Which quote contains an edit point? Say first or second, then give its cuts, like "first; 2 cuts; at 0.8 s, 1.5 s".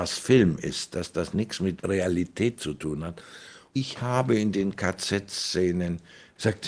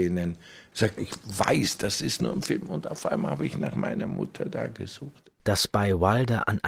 second; 1 cut; at 1.0 s